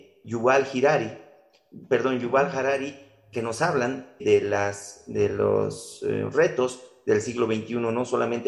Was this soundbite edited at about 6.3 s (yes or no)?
no